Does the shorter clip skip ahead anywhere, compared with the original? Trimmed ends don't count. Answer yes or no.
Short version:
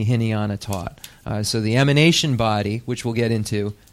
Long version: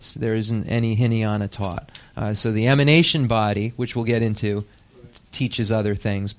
no